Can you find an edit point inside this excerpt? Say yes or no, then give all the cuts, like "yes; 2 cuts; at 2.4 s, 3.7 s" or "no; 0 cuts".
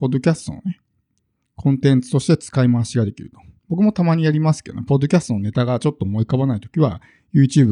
no; 0 cuts